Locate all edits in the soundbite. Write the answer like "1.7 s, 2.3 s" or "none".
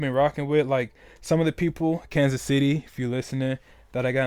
none